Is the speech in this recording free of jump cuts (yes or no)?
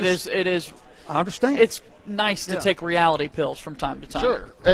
yes